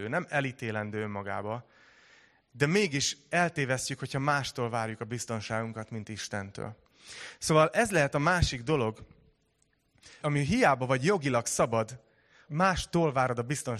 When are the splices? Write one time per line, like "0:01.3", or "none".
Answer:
0:10.2
0:12.5